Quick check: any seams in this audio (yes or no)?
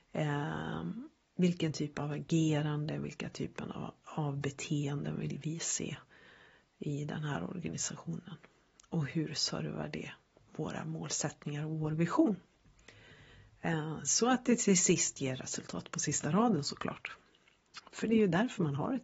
no